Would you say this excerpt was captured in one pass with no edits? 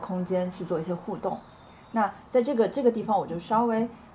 yes; 0 cuts

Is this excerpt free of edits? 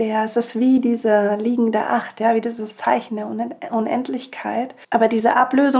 no; 1 cut; at 4.8 s

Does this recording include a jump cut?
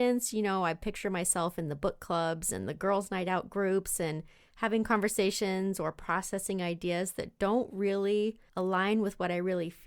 yes; 1 cut; at 8.5 s

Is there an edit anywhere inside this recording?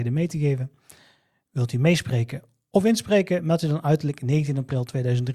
no; 0 cuts

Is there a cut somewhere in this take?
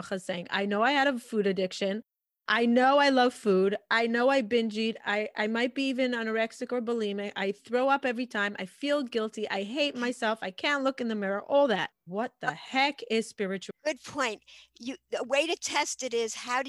yes; 1 cut; at 12.1 s

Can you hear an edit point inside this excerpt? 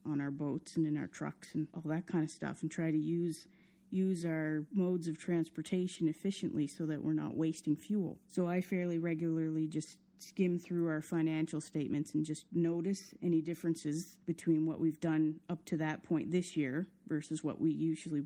no; 0 cuts

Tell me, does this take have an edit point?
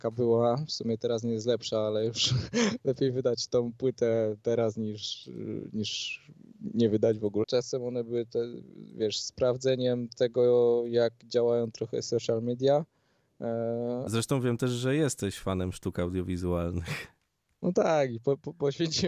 yes; 2 cuts; at 7.4 s, 14.1 s

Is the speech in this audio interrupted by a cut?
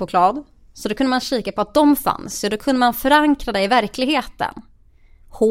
no; 0 cuts

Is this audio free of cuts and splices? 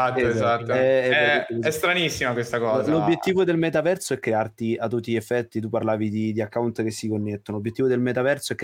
yes; 0 cuts

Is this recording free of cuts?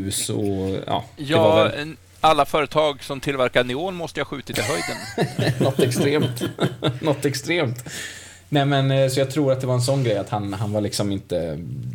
yes; 0 cuts

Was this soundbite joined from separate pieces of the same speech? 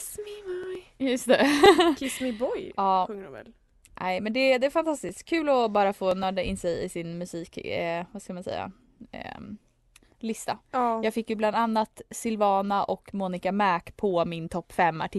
no; 0 cuts

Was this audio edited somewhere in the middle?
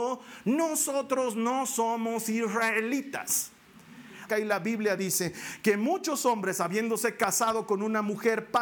yes; 1 cut; at 4.3 s

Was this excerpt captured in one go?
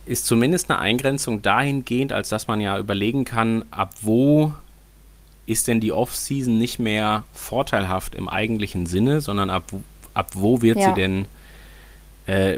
yes; 0 cuts

